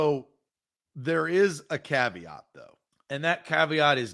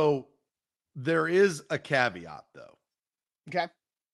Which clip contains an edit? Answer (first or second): first